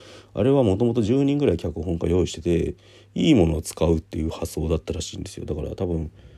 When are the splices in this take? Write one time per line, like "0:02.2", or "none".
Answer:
none